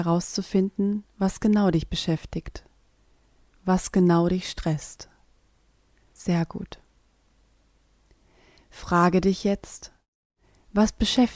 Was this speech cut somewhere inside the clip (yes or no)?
yes